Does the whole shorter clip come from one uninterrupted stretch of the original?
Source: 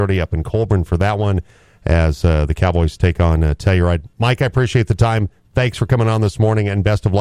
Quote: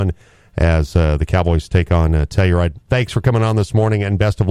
no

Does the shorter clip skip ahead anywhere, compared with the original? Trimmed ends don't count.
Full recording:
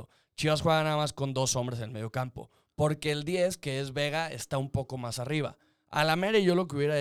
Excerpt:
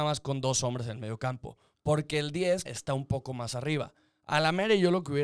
yes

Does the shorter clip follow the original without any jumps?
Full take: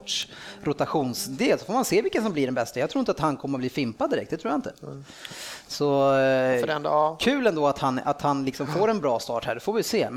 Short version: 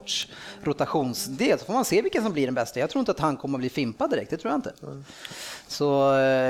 yes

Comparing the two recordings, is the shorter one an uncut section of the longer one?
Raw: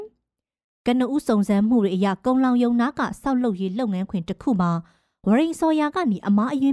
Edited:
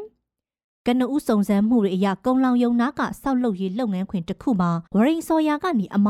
no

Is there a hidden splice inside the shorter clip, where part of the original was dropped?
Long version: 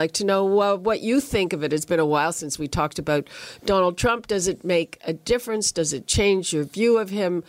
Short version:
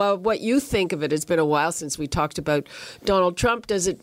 no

